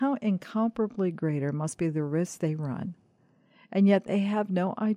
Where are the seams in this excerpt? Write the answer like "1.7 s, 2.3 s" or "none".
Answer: none